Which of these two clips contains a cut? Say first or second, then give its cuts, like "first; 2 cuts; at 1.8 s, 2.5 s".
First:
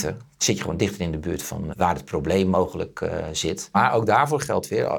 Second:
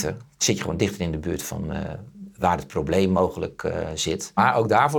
first; 1 cut; at 1.7 s